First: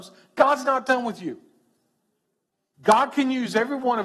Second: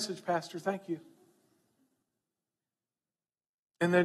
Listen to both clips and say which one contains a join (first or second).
first